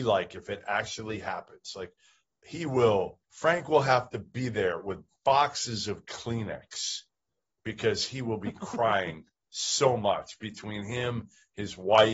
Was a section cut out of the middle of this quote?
yes; 1 cut; at 3.2 s

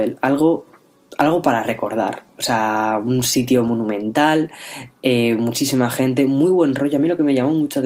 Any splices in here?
no; 0 cuts

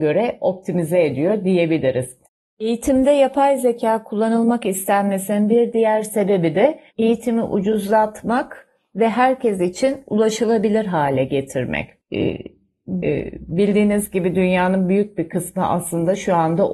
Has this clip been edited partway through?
yes; 2 cuts; at 6.9 s, 13.0 s

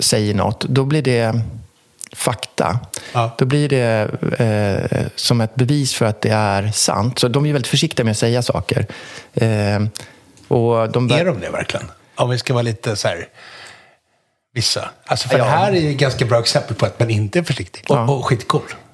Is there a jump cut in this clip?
yes; 1 cut; at 17.8 s

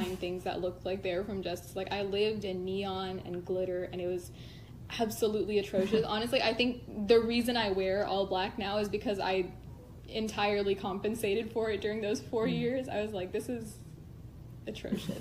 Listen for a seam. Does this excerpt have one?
no; 0 cuts

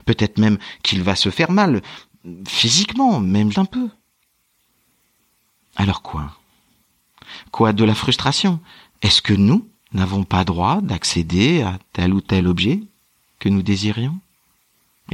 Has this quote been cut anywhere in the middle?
yes; 1 cut; at 3.5 s

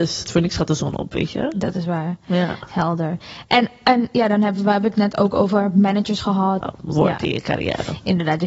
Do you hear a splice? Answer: yes; 1 cut; at 6.6 s

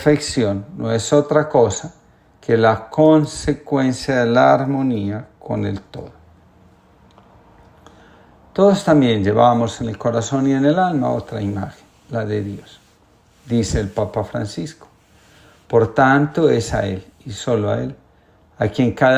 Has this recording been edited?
no; 0 cuts

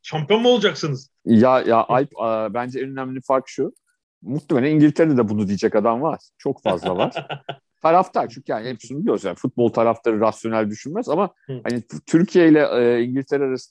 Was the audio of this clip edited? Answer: yes; 1 cut; at 1.2 s

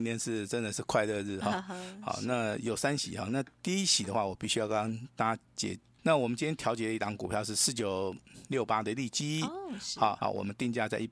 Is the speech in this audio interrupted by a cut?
yes; 2 cuts; at 6.0 s, 10.2 s

